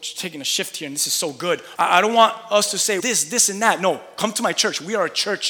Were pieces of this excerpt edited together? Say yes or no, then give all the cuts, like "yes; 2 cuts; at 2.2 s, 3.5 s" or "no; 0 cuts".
yes; 2 cuts; at 1.8 s, 3.0 s